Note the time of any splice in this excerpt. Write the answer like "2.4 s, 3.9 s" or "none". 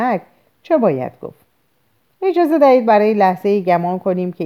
2.1 s